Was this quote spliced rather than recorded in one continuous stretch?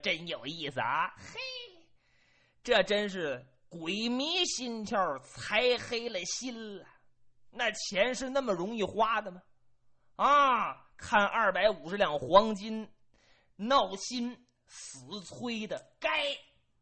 no; 0 cuts

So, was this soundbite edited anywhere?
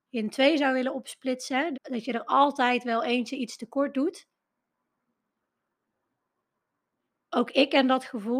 yes; 1 cut; at 1.7 s

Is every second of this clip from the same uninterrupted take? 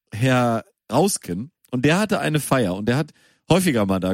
yes; 0 cuts

